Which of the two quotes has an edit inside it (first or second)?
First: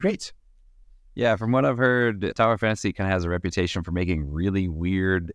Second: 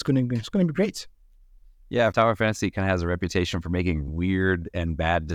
second